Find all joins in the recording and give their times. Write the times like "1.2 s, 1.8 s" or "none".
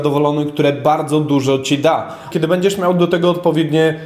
2.3 s